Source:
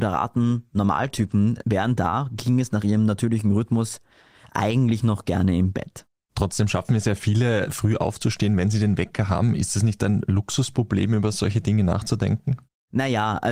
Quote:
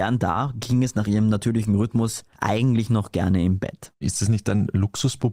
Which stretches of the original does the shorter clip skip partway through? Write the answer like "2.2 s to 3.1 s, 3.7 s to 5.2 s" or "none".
4.1 s to 4.5 s, 6.1 s to 9.6 s